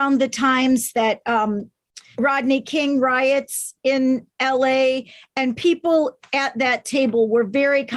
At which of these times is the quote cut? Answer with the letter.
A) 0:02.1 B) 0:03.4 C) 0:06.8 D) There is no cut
A